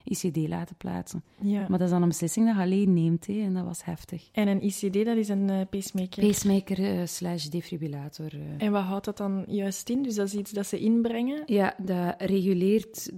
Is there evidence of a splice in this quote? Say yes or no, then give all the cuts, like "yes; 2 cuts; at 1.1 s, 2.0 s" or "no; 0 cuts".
no; 0 cuts